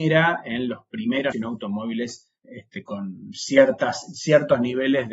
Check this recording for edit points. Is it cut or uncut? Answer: cut